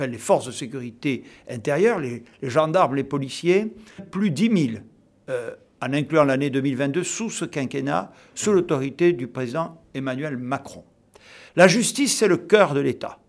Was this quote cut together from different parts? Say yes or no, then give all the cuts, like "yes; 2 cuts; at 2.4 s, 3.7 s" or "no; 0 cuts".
yes; 2 cuts; at 4.0 s, 11.5 s